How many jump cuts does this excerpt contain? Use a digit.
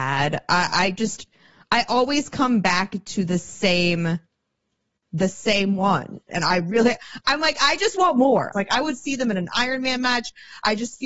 2